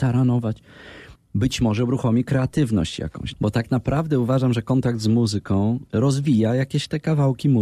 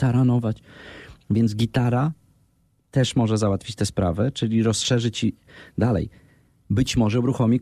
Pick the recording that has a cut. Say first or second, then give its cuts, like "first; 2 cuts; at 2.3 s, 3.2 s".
first; 3 cuts; at 1.2 s, 3.3 s, 5.9 s